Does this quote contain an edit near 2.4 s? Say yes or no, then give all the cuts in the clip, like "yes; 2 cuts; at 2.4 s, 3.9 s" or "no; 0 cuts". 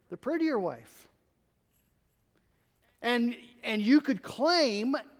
no; 0 cuts